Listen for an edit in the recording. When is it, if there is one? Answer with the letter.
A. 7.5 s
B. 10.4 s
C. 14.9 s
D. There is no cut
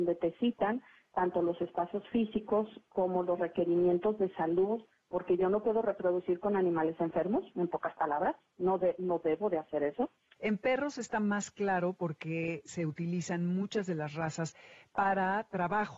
B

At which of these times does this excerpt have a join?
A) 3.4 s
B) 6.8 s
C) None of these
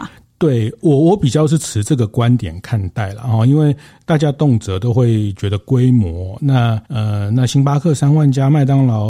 B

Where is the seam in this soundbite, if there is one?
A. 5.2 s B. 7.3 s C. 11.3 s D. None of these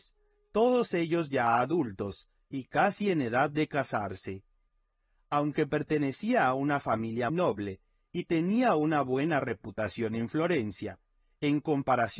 B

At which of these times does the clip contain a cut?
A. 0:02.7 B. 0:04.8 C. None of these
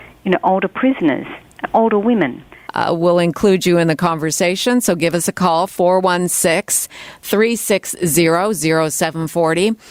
A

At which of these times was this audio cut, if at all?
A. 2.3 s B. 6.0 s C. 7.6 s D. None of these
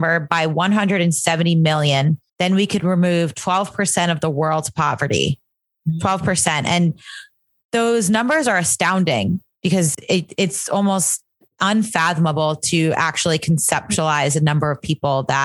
A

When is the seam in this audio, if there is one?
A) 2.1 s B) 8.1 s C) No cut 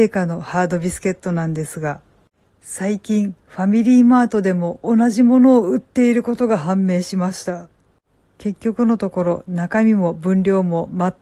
C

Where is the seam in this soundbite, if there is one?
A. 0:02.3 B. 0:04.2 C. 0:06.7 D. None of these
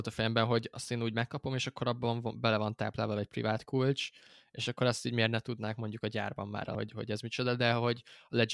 C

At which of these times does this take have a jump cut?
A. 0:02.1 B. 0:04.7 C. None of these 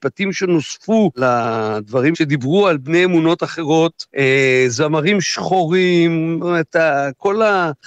A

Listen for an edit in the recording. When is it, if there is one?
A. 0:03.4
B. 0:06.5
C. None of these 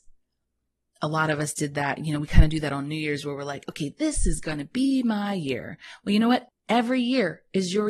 B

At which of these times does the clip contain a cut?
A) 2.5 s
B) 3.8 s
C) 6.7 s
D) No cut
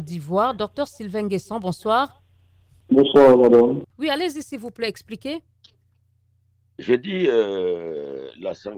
B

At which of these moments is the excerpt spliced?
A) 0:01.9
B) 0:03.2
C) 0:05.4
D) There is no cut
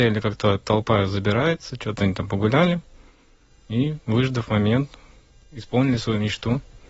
C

